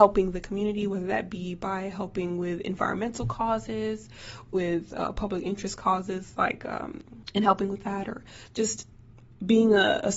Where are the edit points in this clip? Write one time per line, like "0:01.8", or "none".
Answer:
0:07.2

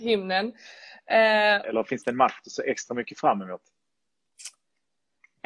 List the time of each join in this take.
0:01.6

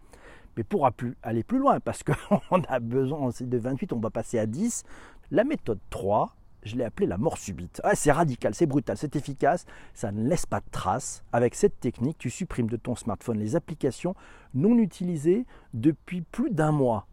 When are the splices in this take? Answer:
0:05.2
0:11.3

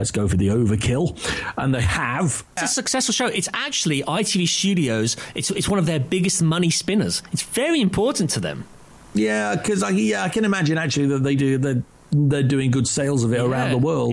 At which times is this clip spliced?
0:02.6

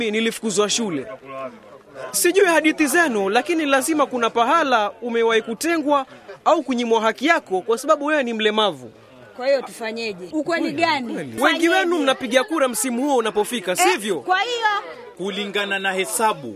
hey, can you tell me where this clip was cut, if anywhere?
0:10.3
0:11.4

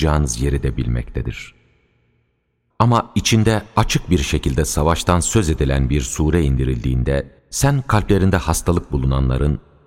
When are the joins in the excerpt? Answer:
0:02.7
0:07.4

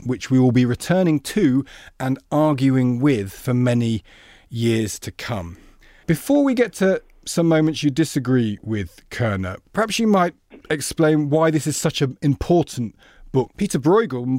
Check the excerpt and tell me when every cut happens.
0:06.0
0:09.6
0:13.5

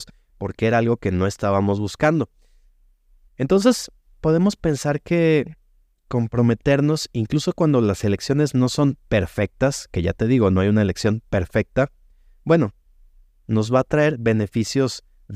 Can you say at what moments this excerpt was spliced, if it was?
0:03.3

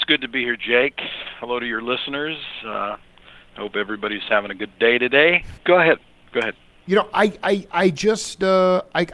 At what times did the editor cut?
0:05.6

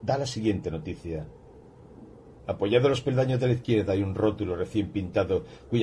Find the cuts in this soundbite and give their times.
0:02.4

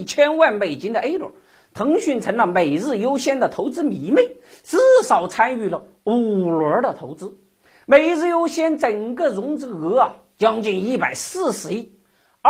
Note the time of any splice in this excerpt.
none

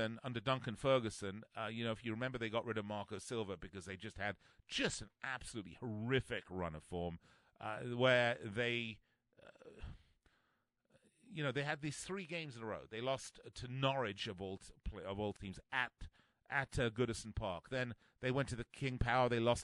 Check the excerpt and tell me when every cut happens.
none

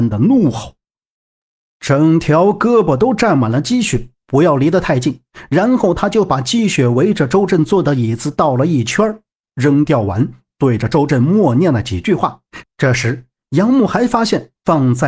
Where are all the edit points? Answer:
0:04.1
0:12.6

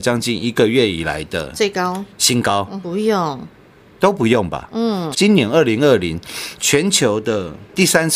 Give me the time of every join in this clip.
0:02.8
0:05.1

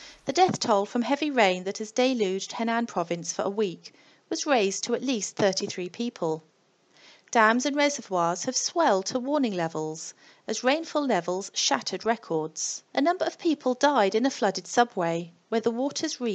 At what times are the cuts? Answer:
0:12.9

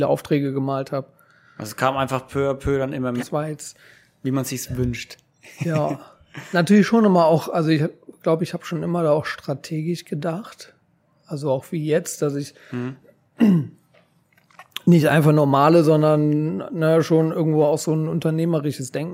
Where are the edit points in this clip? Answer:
0:03.2

